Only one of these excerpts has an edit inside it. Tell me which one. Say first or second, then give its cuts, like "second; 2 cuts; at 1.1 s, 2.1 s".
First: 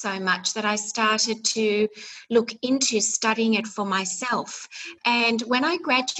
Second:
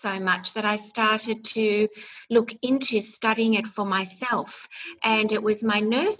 first; 1 cut; at 5.0 s